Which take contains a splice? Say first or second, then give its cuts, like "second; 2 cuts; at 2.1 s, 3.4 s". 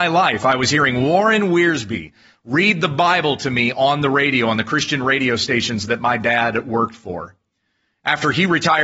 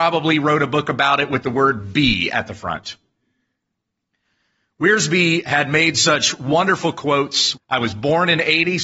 second; 1 cut; at 7.5 s